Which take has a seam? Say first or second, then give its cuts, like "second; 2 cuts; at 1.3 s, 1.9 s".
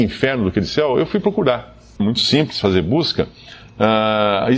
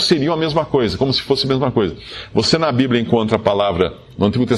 first; 1 cut; at 2.0 s